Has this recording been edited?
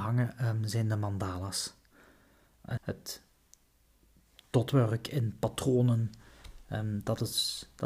yes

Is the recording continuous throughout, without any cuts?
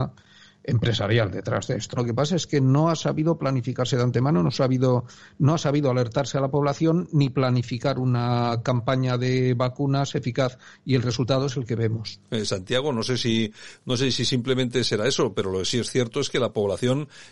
no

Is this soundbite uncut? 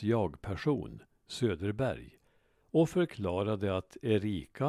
yes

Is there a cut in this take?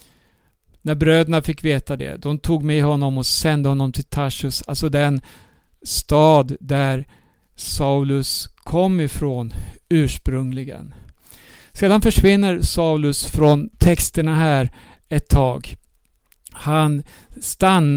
no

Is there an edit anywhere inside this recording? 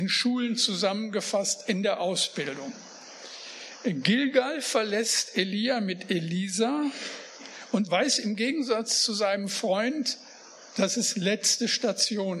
no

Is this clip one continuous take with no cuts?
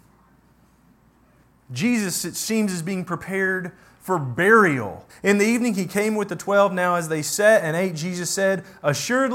no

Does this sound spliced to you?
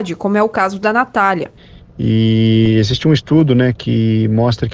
no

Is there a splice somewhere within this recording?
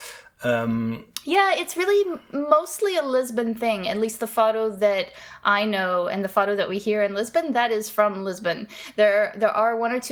no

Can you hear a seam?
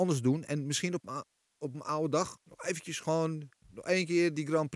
yes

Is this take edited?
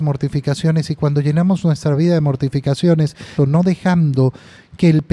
yes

